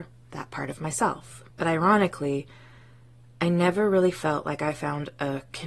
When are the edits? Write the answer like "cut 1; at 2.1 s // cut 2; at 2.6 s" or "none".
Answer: cut 1; at 1.5 s